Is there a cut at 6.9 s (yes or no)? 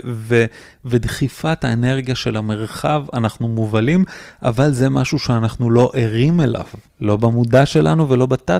yes